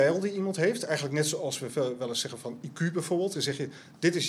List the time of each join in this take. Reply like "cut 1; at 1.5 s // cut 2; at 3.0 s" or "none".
cut 1; at 3.3 s

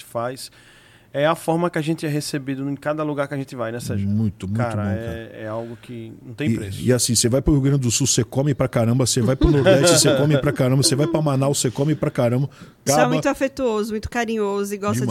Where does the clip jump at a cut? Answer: cut 1; at 12.9 s

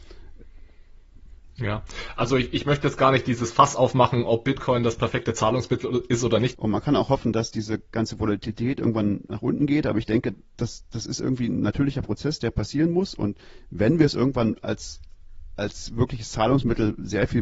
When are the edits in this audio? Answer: cut 1; at 6.5 s

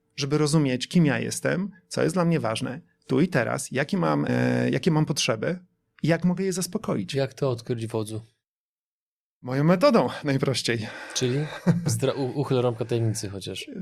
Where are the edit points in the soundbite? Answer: cut 1; at 4.3 s

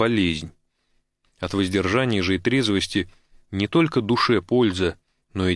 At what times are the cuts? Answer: none

